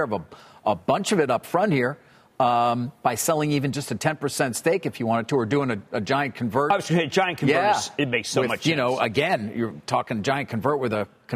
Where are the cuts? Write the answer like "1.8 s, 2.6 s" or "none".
none